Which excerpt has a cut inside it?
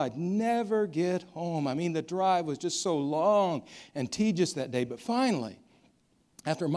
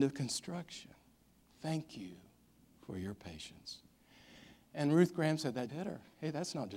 second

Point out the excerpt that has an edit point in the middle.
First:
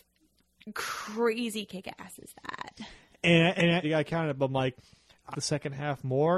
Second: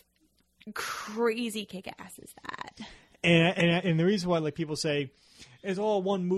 first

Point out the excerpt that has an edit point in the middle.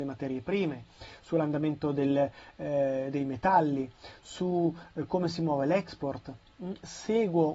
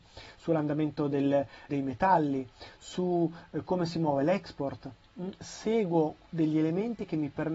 second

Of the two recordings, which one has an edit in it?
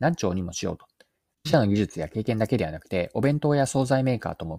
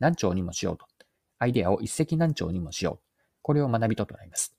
first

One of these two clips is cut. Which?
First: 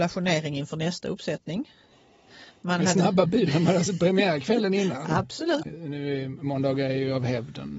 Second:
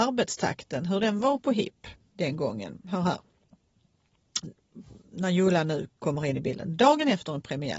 first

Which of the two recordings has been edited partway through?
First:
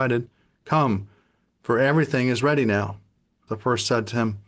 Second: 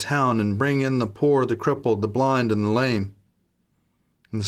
first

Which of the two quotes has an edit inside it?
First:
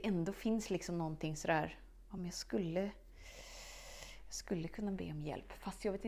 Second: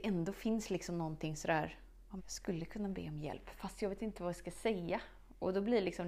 second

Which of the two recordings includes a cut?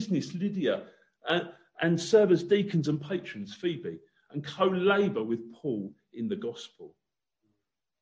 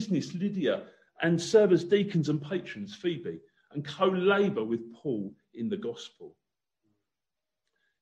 second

